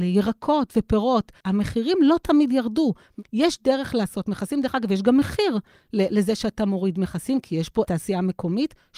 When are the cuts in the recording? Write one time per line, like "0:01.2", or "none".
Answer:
0:01.4